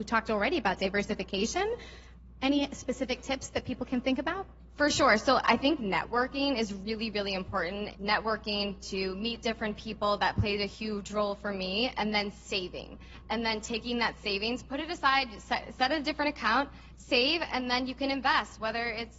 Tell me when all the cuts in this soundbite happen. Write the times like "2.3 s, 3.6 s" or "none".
none